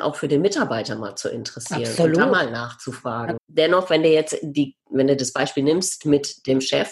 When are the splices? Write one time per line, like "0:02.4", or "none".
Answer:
0:03.4

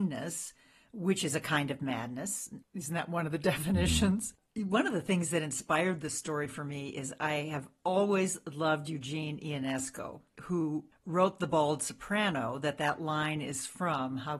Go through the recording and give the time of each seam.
0:02.6

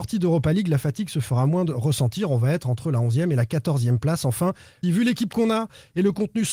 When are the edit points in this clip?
0:04.8

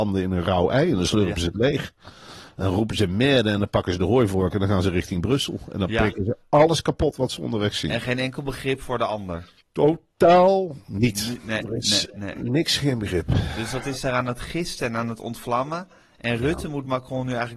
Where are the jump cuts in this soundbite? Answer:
0:09.6

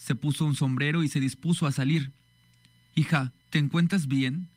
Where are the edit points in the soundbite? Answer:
0:03.4

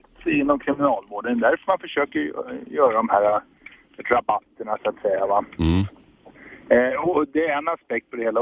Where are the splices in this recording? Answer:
none

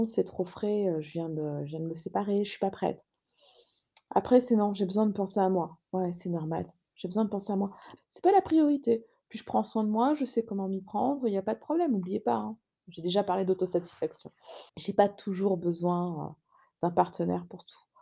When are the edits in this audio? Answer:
0:05.8
0:08.0
0:14.7

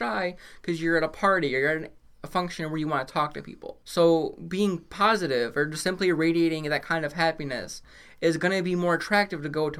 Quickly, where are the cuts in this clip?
0:03.8

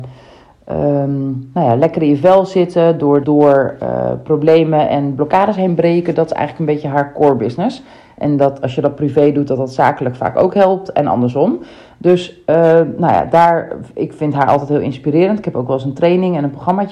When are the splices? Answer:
0:03.2

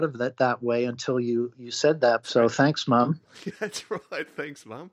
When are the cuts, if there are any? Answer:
0:02.2

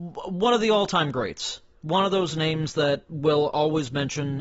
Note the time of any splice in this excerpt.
none

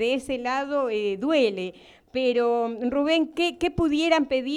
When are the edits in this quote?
none

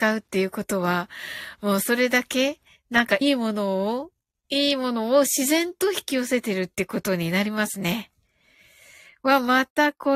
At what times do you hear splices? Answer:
0:03.2

